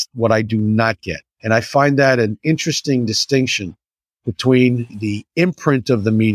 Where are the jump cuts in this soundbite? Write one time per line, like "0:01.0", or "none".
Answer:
0:01.3